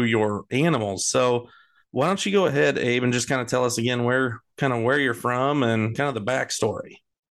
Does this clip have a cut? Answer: no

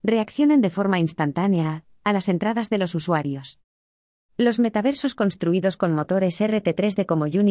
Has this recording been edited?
no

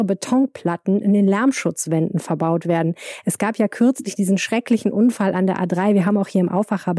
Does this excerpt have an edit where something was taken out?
no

